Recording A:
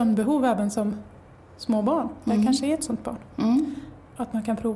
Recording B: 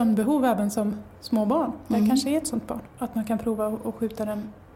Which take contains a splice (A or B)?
B